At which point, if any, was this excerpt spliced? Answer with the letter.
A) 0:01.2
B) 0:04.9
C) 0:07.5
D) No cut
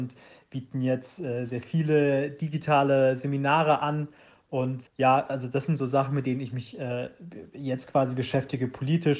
B